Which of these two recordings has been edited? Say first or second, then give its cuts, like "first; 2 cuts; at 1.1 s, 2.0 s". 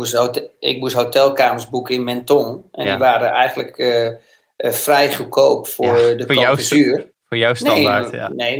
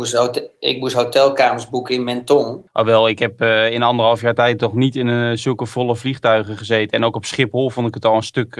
second; 1 cut; at 2.7 s